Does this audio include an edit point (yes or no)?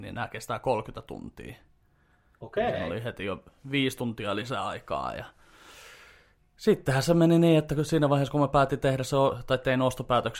no